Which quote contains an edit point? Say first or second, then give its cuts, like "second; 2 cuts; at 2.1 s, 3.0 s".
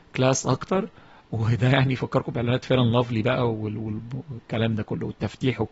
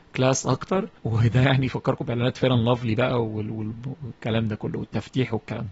second; 1 cut; at 1.0 s